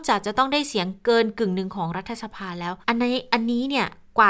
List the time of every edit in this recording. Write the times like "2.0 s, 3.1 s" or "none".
2.8 s